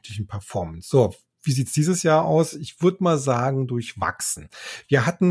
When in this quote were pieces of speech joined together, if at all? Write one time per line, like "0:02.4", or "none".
none